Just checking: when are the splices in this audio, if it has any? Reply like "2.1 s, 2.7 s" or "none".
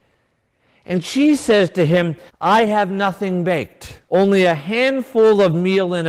2.3 s, 4.1 s